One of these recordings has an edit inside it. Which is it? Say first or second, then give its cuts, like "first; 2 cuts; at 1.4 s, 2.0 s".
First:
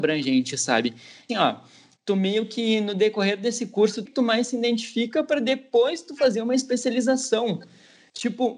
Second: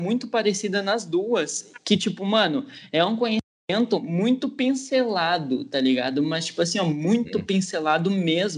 first; 2 cuts; at 1.3 s, 4.0 s